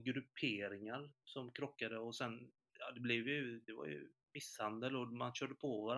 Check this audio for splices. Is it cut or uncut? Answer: cut